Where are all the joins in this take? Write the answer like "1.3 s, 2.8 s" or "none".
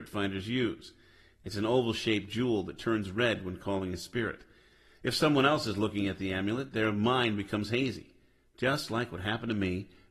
none